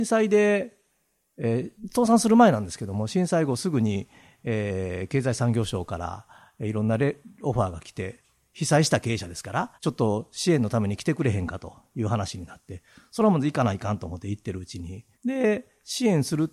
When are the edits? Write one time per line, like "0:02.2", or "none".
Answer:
0:01.8
0:09.7
0:15.1